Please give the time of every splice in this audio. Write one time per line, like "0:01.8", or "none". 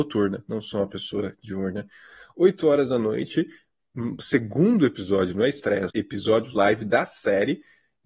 0:05.9

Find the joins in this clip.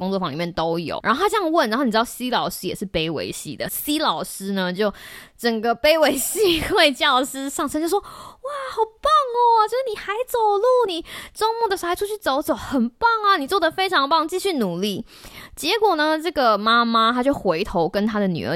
0:01.0
0:10.9

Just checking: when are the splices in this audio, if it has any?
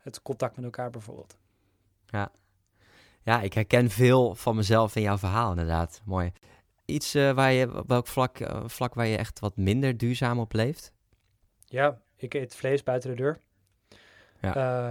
0:06.9

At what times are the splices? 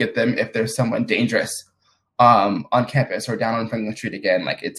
none

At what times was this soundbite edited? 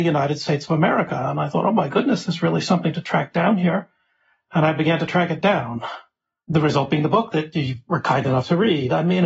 none

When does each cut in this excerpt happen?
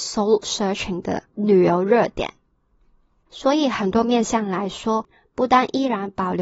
0:03.3

